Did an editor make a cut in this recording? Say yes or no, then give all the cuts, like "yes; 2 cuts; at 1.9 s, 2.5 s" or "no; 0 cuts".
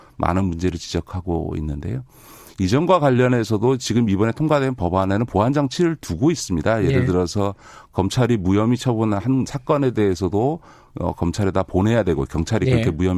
no; 0 cuts